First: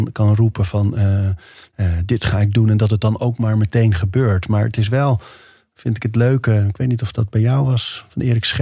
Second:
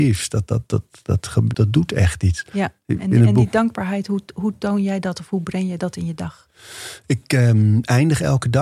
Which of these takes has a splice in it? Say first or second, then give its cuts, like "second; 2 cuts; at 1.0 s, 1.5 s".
second; 1 cut; at 1.5 s